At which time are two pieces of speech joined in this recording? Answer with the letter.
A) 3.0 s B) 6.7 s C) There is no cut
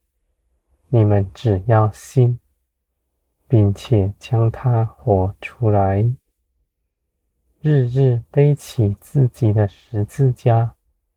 C